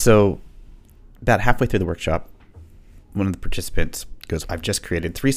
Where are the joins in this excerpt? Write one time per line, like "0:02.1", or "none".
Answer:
0:04.4